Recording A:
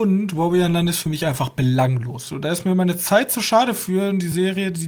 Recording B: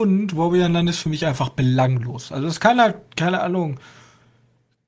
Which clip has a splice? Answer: A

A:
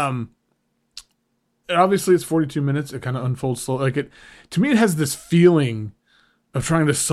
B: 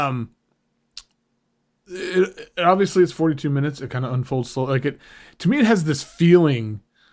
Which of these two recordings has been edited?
A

